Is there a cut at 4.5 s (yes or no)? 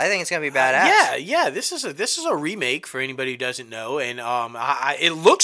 no